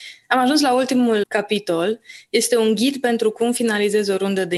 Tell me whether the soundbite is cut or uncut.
cut